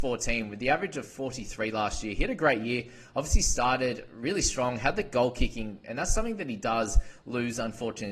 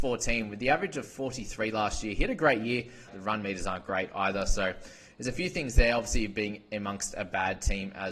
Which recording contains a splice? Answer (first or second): second